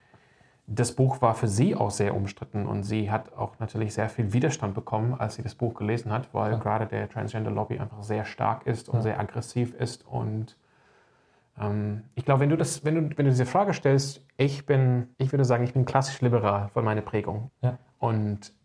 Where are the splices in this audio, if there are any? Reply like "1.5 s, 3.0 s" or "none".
15.1 s, 17.5 s